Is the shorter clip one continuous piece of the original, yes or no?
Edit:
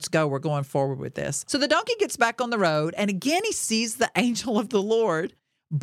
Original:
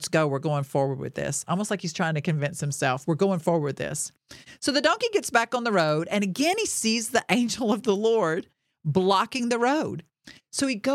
no